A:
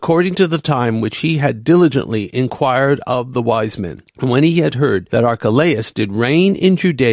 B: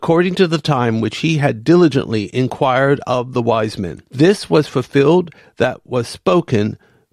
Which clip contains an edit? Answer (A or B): A